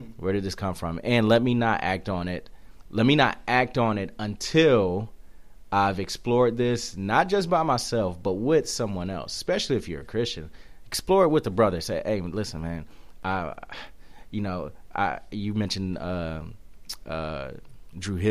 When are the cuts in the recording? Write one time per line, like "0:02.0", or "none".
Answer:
none